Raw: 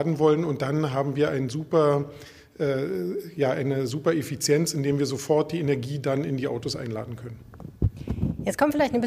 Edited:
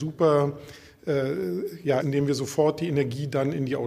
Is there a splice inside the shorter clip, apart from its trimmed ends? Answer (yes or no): yes